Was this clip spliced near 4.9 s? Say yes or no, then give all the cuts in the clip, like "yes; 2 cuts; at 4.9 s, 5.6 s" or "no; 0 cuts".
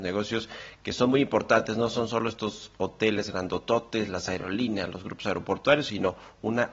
no; 0 cuts